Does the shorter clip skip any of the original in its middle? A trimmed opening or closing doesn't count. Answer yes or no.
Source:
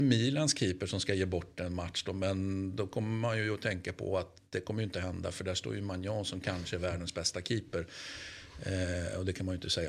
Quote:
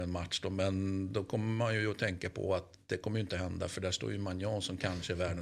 no